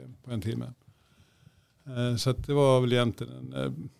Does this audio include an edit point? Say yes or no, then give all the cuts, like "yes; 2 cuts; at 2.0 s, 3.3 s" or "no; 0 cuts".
no; 0 cuts